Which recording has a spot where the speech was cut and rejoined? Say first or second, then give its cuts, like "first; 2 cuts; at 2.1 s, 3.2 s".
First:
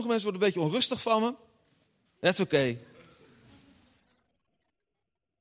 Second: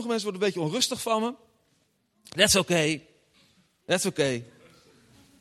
first; 1 cut; at 2.1 s